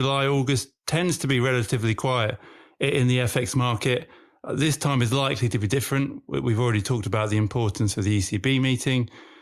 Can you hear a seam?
no; 0 cuts

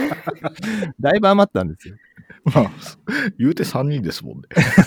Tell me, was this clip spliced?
no; 0 cuts

